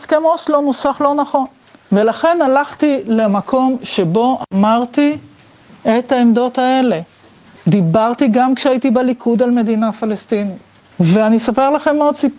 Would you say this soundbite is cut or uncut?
uncut